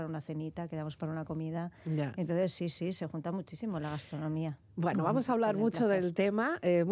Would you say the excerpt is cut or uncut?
uncut